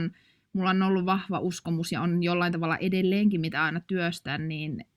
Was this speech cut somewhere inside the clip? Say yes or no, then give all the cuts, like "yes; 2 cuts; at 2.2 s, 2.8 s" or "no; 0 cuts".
no; 0 cuts